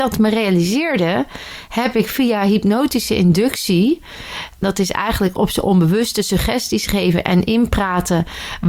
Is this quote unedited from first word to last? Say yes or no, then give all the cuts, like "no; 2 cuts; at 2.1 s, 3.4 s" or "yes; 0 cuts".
yes; 0 cuts